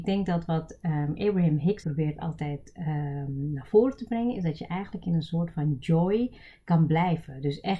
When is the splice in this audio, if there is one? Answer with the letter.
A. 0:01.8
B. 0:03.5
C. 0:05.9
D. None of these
A